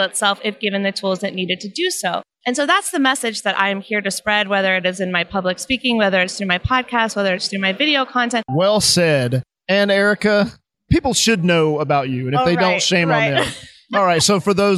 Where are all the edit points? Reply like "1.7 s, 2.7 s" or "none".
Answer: 8.5 s